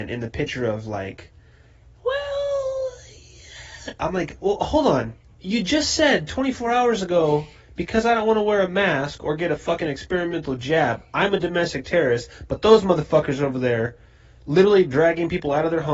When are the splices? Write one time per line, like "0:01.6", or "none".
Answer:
none